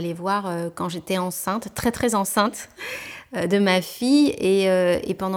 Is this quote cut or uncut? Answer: uncut